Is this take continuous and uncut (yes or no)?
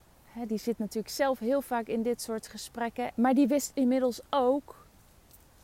no